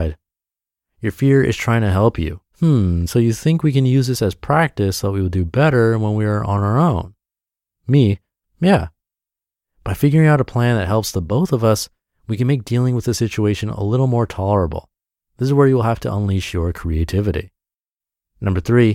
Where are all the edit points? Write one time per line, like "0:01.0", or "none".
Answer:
0:02.5